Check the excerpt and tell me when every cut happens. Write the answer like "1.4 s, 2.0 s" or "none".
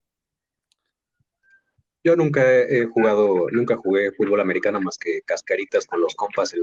none